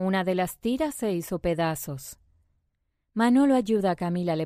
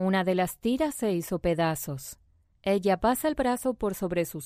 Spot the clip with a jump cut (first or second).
second